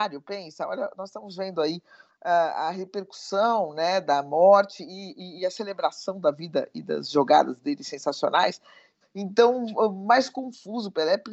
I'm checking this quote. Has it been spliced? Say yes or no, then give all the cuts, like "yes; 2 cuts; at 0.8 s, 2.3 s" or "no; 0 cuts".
yes; 2 cuts; at 2.1 s, 9.0 s